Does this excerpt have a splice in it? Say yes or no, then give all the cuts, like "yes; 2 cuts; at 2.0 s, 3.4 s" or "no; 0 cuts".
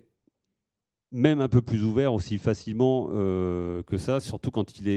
no; 0 cuts